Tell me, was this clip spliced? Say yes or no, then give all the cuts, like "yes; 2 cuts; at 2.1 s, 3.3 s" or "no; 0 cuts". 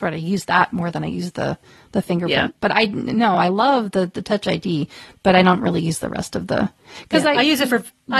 no; 0 cuts